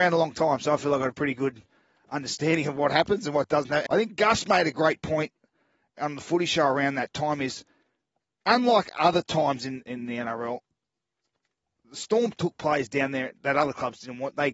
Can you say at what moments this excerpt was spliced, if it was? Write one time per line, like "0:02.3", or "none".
0:03.9
0:09.8